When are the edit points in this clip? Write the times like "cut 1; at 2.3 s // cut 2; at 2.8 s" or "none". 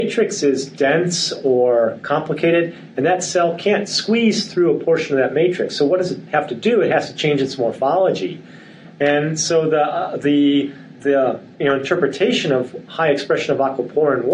cut 1; at 11.5 s